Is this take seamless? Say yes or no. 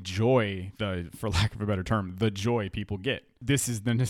yes